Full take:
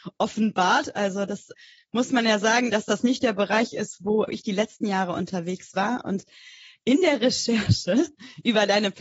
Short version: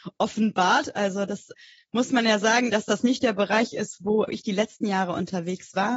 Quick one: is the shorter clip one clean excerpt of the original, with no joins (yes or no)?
yes